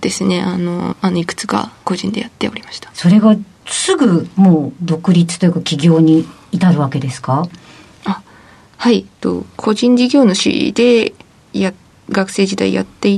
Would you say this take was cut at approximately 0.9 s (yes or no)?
yes